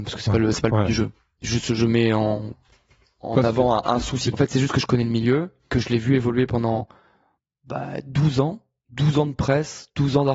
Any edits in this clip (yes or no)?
yes